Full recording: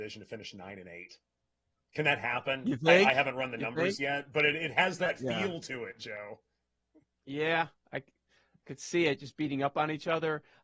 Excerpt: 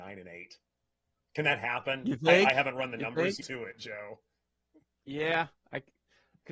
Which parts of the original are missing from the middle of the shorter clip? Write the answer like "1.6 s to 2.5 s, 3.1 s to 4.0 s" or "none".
4.0 s to 5.6 s